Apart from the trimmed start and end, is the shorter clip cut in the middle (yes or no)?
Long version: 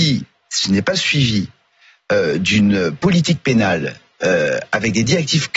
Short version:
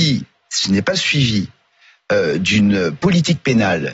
no